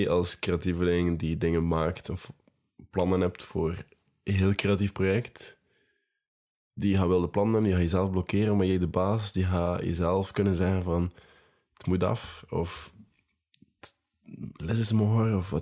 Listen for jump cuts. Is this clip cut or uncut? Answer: uncut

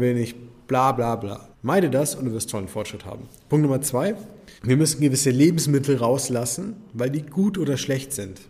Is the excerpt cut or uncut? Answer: cut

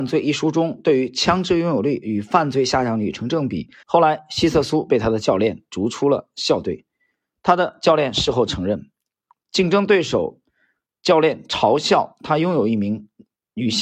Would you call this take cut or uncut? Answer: cut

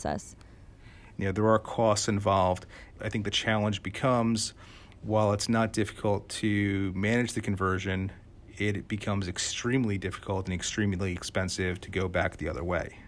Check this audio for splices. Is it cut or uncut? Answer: cut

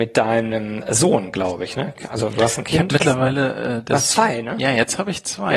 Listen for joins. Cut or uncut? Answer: uncut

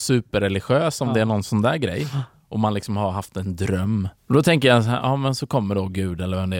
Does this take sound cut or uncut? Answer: cut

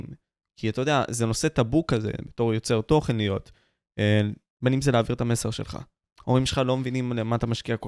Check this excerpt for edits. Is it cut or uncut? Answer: uncut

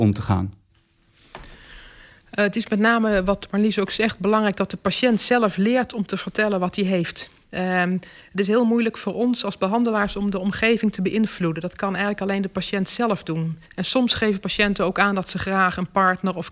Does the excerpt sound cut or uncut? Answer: cut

